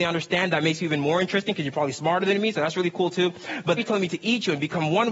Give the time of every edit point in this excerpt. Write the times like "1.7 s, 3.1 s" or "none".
3.8 s